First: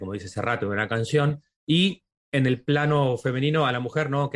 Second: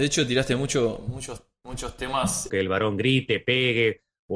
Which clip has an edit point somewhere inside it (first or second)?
second